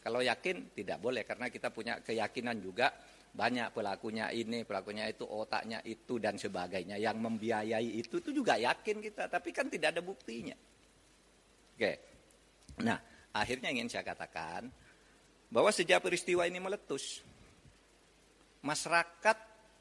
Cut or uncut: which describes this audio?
uncut